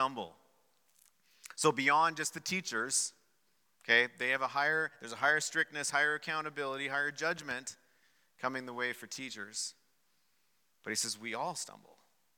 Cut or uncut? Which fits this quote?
uncut